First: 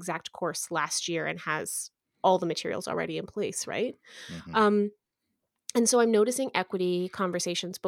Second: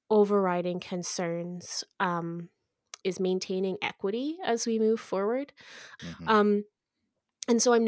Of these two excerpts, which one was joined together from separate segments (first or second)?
second